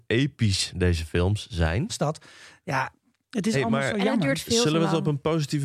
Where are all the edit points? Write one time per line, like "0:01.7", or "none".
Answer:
0:01.9